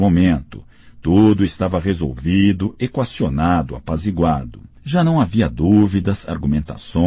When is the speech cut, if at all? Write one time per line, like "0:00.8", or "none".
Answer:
none